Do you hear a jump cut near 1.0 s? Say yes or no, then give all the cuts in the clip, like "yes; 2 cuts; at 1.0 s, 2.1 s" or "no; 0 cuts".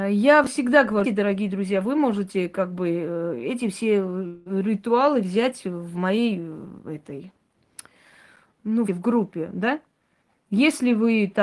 yes; 2 cuts; at 1.0 s, 8.9 s